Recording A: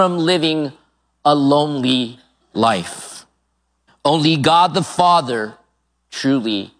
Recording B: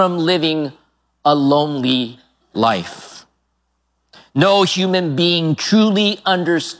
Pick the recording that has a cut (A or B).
A